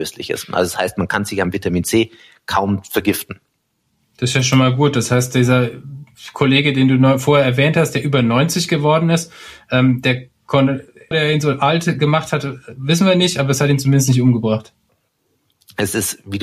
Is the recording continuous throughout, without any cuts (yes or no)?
no